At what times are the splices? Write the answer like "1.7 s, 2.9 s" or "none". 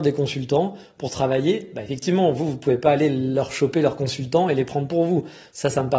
none